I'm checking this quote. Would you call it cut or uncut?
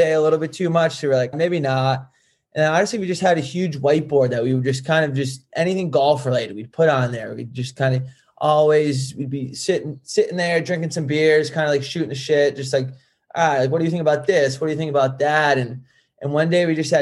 cut